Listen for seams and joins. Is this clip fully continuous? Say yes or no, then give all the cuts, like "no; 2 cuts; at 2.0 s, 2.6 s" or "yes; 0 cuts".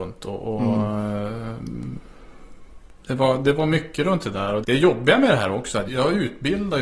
no; 2 cuts; at 4.6 s, 5.9 s